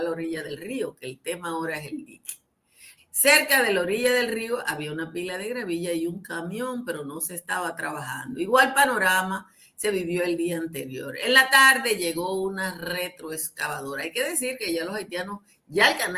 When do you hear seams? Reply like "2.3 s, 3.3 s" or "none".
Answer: 3.0 s